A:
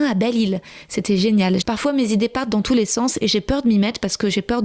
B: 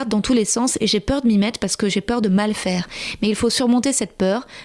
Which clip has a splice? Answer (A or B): A